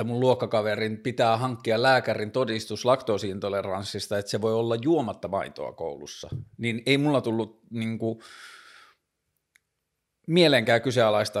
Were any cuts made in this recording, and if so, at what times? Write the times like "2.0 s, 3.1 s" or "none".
none